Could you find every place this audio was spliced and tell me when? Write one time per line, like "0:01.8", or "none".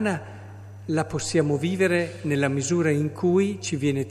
none

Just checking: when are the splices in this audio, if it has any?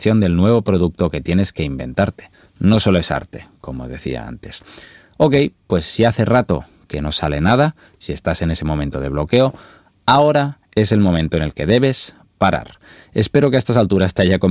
none

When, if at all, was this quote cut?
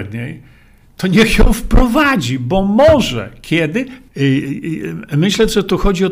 0:04.1

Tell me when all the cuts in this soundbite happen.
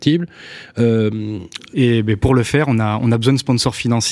0:01.7

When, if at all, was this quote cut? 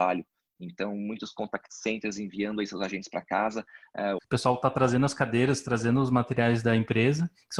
0:04.2

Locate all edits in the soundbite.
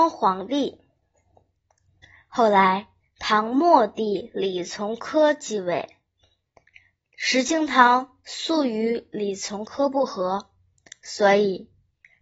none

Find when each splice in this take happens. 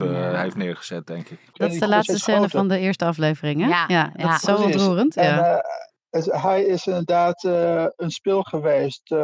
0:01.5

